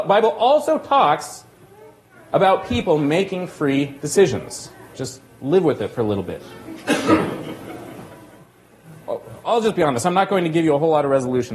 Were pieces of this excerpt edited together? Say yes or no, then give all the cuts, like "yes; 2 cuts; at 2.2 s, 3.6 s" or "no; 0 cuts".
yes; 1 cut; at 4.9 s